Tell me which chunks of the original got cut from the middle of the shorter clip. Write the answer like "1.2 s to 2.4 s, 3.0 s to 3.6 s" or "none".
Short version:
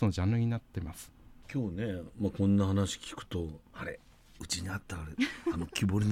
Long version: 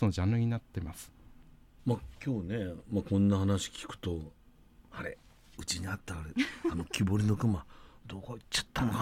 1.4 s to 2.1 s, 4.4 s to 4.8 s